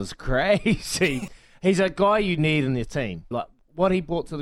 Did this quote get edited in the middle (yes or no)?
yes